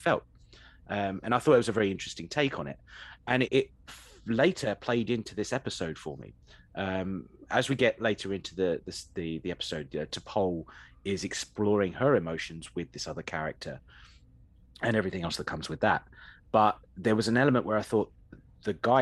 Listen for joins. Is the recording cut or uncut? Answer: cut